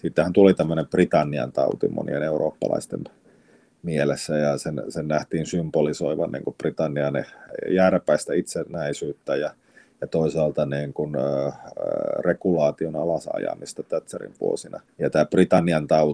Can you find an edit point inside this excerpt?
no; 0 cuts

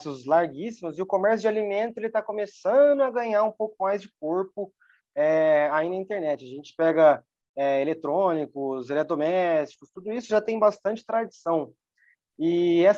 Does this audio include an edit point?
no; 0 cuts

